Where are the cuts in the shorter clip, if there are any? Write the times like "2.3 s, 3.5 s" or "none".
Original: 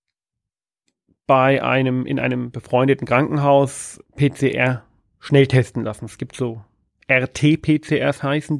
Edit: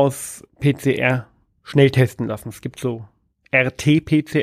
none